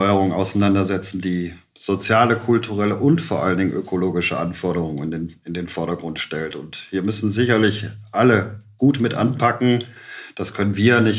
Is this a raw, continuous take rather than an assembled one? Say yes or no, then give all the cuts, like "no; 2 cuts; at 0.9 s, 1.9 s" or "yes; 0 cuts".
yes; 0 cuts